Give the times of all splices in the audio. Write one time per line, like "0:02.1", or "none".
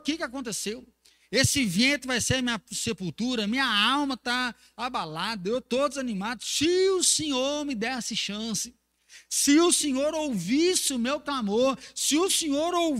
none